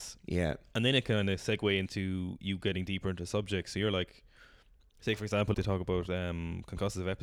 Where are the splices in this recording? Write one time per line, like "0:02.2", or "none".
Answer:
0:05.5